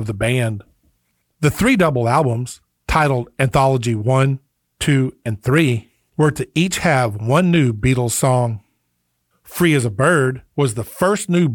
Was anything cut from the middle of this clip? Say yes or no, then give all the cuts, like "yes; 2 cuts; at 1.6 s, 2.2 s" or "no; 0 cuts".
no; 0 cuts